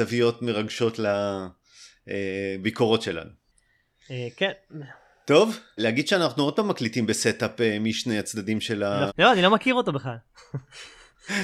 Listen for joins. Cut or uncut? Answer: cut